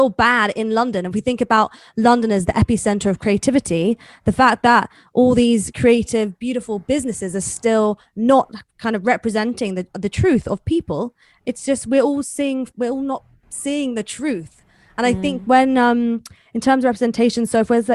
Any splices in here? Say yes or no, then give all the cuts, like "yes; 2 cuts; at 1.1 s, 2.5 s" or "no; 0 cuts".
no; 0 cuts